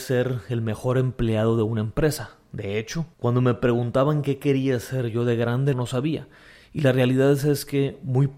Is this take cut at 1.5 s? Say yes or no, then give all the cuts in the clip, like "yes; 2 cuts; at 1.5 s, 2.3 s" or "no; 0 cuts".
no; 2 cuts; at 3.1 s, 5.7 s